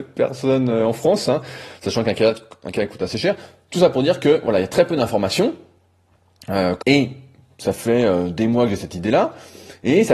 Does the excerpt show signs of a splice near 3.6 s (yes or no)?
no